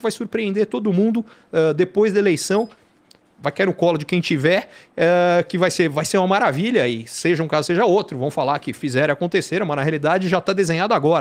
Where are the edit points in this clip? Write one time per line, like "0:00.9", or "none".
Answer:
none

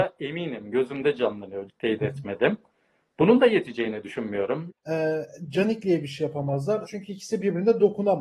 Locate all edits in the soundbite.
0:01.7
0:04.7
0:06.8

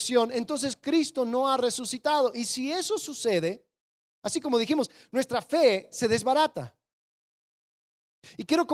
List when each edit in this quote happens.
none

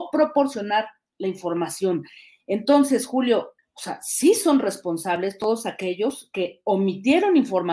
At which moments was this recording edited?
0:03.6

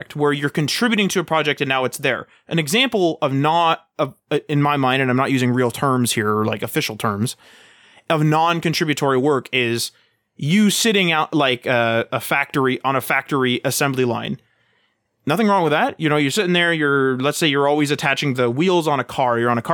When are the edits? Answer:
none

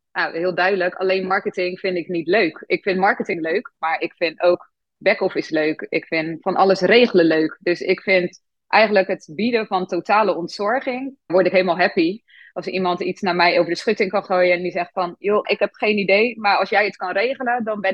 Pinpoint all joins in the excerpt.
0:11.3
0:15.4

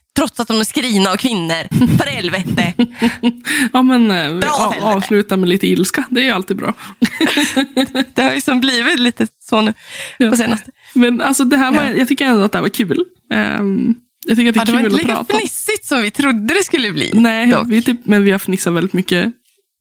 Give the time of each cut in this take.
none

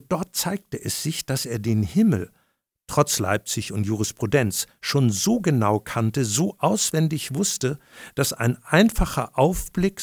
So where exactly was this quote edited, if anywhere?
none

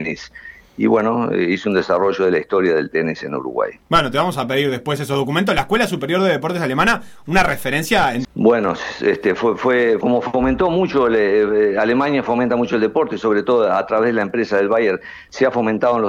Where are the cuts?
0:08.2
0:10.0

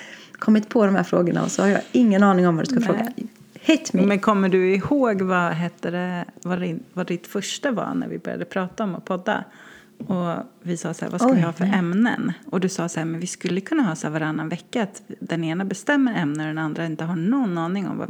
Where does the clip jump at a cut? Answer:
none

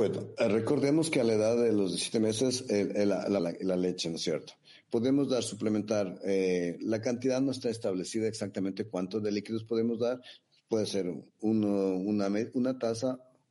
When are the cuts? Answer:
0:03.4
0:11.4

